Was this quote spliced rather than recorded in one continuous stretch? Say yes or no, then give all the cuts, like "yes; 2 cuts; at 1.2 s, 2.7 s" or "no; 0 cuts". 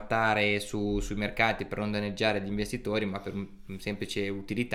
no; 0 cuts